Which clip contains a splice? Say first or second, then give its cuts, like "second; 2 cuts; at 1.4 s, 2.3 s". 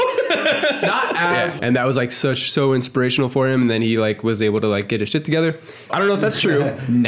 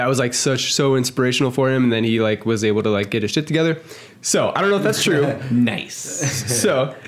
first; 2 cuts; at 1.6 s, 5.9 s